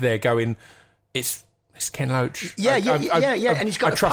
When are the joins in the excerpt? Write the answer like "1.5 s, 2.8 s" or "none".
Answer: none